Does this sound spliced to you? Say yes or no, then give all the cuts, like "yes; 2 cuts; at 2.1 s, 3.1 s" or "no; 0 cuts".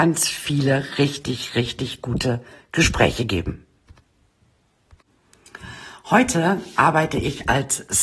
no; 0 cuts